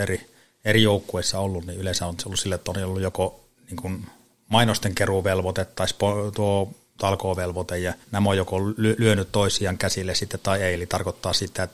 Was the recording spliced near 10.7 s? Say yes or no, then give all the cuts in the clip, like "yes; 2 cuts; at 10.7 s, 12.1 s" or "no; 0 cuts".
no; 2 cuts; at 3.5 s, 8.0 s